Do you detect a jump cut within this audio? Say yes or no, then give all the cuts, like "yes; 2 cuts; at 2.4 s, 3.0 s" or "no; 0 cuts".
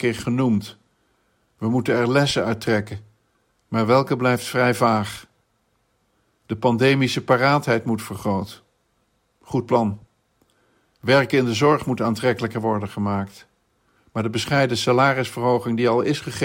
no; 0 cuts